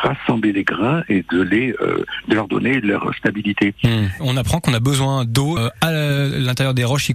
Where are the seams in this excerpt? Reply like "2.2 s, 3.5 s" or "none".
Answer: 4.2 s, 5.6 s